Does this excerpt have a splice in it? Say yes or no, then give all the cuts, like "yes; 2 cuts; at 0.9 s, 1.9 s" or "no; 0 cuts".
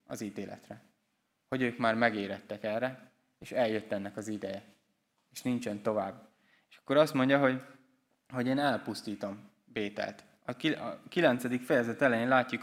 no; 0 cuts